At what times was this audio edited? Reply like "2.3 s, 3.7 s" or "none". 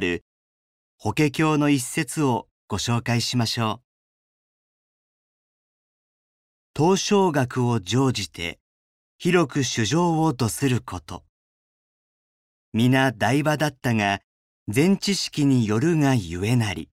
none